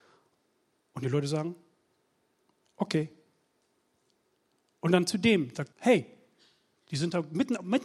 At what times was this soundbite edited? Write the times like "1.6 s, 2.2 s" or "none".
5.7 s